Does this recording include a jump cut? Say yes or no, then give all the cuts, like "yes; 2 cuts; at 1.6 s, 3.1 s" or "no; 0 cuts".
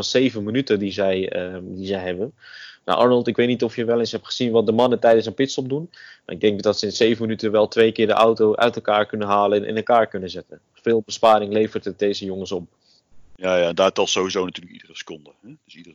yes; 1 cut; at 10.7 s